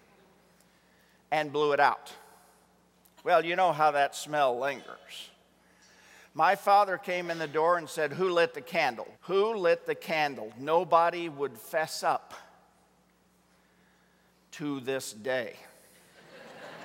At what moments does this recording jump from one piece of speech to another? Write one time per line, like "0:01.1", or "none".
0:09.1